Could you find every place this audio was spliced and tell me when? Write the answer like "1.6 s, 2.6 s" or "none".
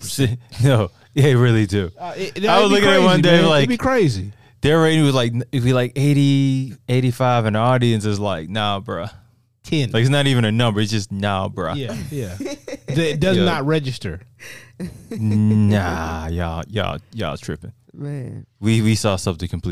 none